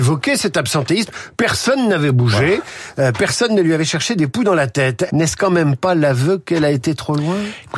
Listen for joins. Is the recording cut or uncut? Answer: cut